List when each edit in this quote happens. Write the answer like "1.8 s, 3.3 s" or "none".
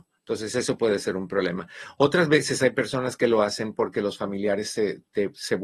none